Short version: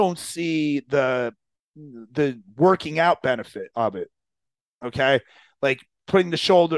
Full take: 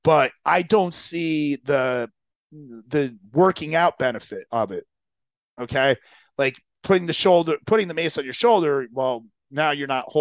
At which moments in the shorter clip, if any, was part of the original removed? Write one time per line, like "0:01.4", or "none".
none